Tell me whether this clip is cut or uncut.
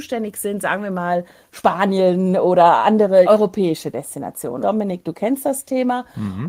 cut